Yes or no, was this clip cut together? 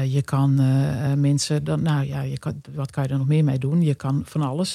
no